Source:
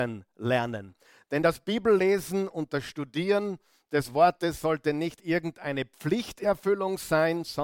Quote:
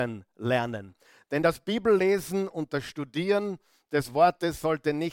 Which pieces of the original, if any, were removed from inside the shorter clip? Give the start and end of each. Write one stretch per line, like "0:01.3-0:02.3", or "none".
none